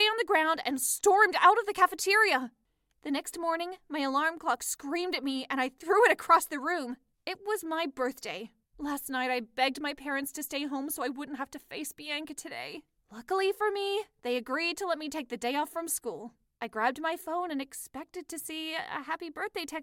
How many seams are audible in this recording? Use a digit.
0